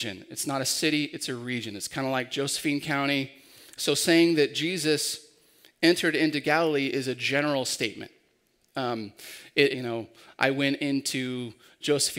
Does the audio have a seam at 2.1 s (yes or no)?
no